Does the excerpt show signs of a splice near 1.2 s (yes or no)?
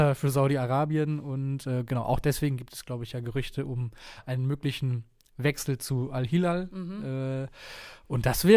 no